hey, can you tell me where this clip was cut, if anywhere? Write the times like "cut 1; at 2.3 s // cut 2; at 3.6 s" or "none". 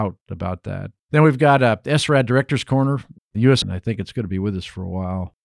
cut 1; at 1.0 s // cut 2; at 3.6 s